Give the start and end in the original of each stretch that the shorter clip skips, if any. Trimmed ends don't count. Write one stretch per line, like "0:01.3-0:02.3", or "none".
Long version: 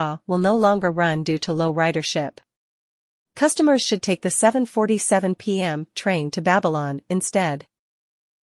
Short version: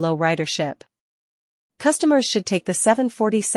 none